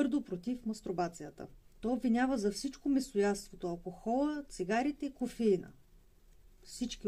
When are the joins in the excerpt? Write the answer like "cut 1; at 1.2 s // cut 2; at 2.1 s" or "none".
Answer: cut 1; at 1.7 s